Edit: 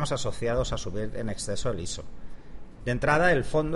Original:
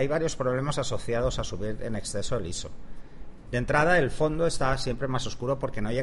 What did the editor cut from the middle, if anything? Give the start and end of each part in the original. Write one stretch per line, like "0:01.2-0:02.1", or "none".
none